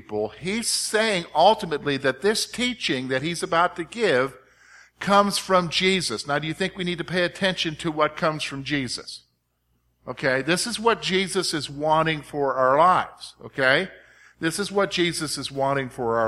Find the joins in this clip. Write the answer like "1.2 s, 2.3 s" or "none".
none